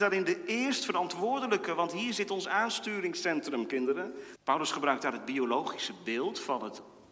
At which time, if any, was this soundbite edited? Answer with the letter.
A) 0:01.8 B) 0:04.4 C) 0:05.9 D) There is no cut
B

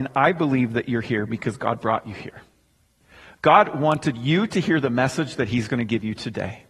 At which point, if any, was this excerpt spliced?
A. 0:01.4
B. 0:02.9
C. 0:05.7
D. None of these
D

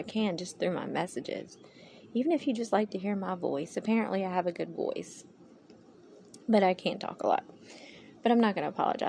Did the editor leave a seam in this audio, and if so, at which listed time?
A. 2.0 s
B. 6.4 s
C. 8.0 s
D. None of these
D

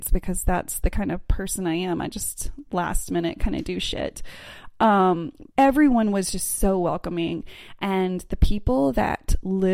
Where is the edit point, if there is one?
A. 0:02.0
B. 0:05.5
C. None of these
B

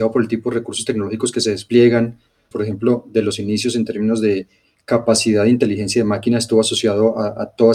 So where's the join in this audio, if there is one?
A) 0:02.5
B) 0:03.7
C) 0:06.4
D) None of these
A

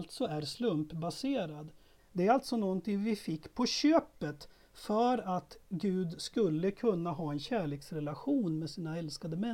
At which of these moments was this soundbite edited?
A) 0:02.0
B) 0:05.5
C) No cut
A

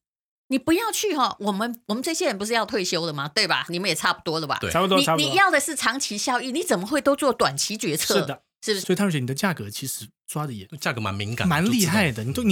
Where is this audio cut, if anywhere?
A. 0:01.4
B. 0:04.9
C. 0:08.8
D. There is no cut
C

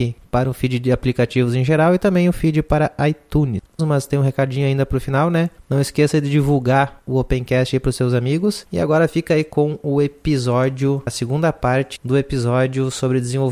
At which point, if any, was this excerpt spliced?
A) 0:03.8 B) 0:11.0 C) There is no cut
A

